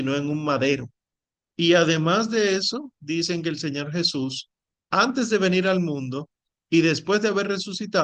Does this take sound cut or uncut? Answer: cut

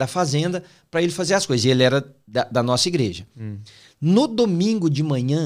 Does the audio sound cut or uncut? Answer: uncut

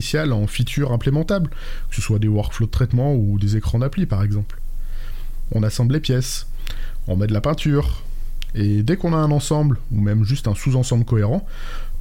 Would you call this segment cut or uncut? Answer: cut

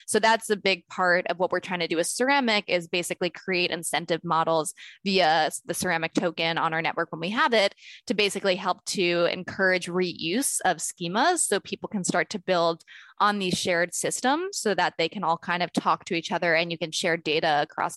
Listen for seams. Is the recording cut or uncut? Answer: uncut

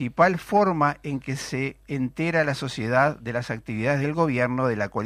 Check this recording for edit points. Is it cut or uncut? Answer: uncut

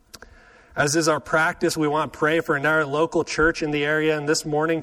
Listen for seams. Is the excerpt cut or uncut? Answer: uncut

